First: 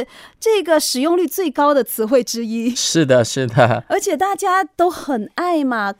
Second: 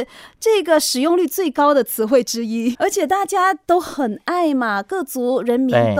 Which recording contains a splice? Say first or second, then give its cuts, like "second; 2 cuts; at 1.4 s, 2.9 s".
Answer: second; 1 cut; at 2.7 s